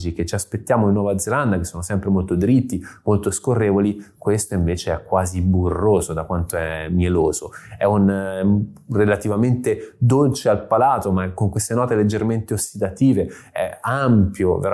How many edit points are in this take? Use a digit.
0